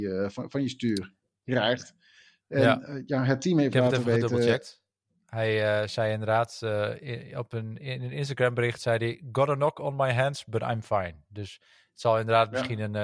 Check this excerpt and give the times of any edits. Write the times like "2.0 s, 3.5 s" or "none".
none